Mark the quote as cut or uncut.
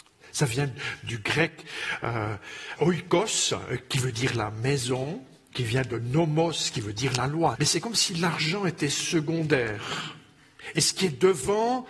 cut